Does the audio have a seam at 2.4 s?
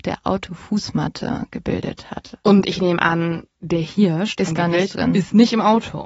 yes; 2 cuts; at 2.4 s, 4.4 s

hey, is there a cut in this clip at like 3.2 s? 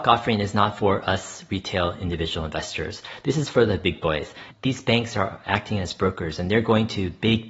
no; 0 cuts

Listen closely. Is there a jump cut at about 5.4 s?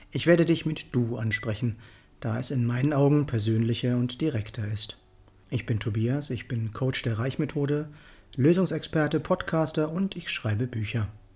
yes; 1 cut; at 5.4 s

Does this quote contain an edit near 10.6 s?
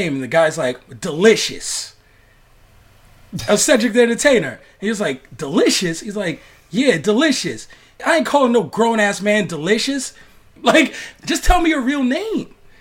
yes; 2 cuts; at 8.0 s, 10.6 s

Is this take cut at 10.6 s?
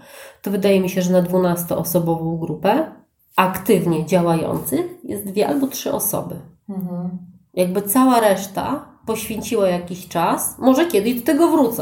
no; 0 cuts

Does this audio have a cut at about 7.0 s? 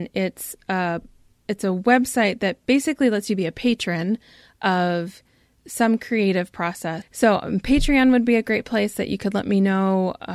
yes; 1 cut; at 7.0 s

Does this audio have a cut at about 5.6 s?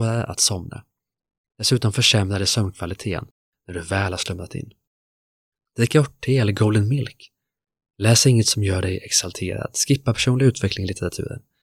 yes; 1 cut; at 5.6 s

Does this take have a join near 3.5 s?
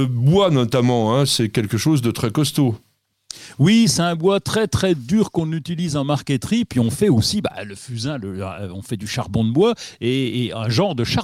no; 0 cuts

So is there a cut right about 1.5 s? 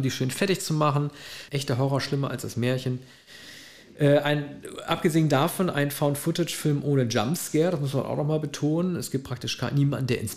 yes; 1 cut; at 1.5 s

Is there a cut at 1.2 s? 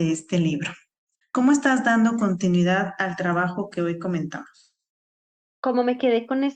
yes; 1 cut; at 1.2 s

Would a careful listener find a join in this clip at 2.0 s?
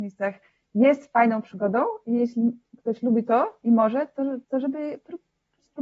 no; 1 cut; at 4.4 s

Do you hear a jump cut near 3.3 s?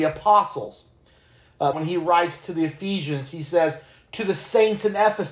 no; 1 cut; at 1.7 s

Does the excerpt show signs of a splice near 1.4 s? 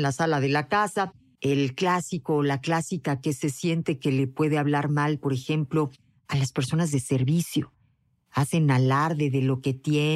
yes; 1 cut; at 1.4 s

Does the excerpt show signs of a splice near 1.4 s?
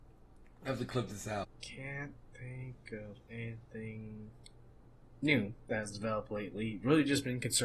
yes; 1 cut; at 1.4 s

